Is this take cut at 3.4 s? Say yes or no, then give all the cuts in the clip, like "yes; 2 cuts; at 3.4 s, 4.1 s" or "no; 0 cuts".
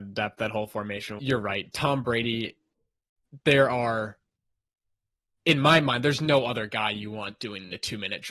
no; 1 cut; at 1.2 s